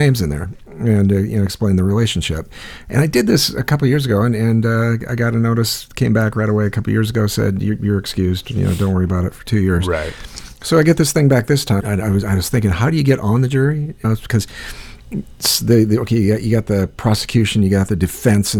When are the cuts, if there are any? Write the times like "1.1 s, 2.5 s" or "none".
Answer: 11.8 s, 14.0 s